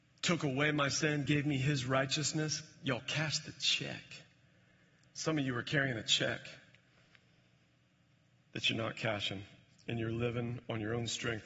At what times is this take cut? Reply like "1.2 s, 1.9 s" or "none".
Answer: none